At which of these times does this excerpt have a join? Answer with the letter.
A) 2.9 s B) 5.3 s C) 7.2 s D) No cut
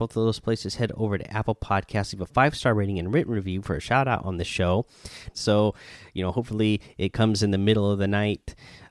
B